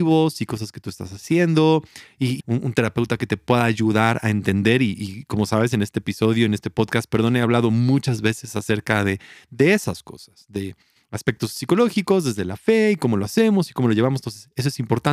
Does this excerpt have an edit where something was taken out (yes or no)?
yes